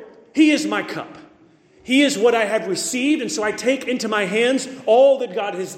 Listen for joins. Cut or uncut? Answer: uncut